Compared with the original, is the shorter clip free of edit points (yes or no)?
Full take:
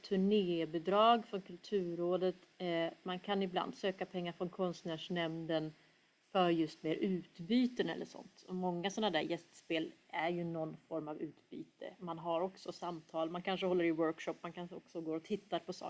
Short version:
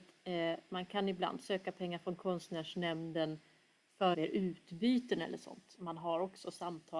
no